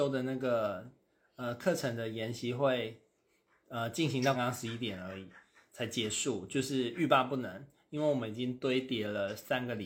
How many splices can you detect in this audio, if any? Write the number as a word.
one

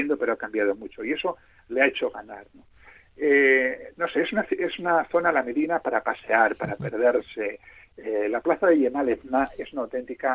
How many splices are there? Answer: zero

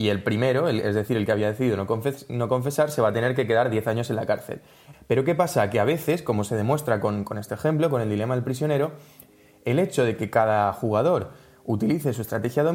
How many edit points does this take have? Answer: one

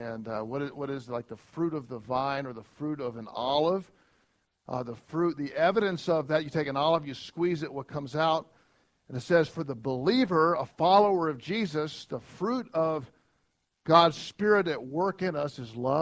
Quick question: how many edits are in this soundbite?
zero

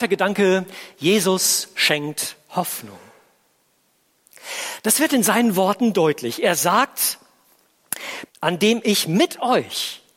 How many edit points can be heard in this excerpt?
one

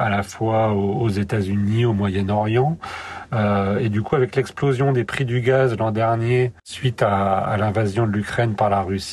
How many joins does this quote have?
one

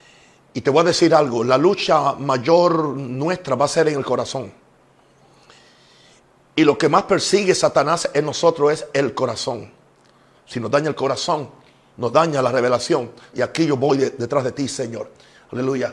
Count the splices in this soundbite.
two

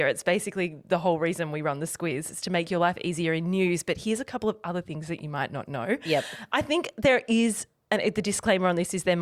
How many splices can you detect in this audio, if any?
zero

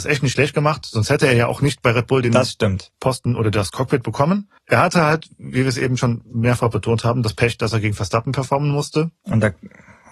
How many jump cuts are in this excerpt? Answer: one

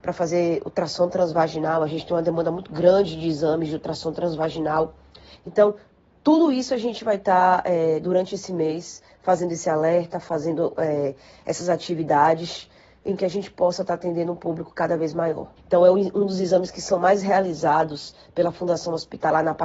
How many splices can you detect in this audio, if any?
two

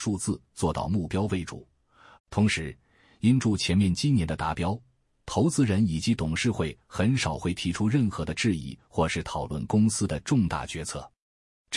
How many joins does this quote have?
one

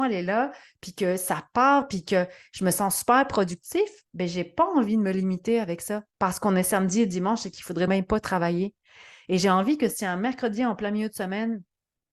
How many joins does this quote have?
one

